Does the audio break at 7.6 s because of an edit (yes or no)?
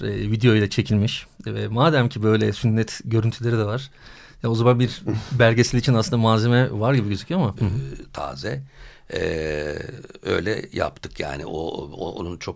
yes